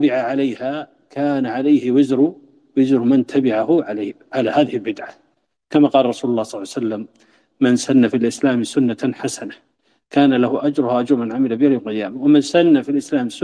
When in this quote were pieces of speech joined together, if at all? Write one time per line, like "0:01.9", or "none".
none